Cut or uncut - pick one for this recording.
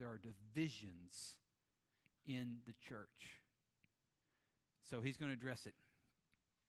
uncut